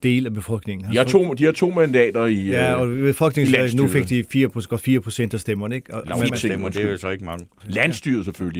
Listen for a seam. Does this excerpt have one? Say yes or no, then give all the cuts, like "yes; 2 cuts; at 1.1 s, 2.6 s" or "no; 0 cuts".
yes; 2 cuts; at 6.3 s, 7.6 s